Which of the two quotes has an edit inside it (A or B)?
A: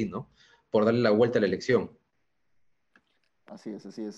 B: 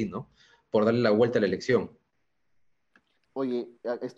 B